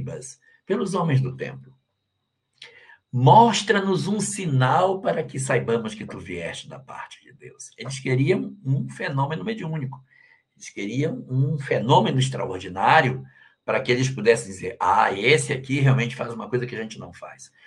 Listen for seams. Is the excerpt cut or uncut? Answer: uncut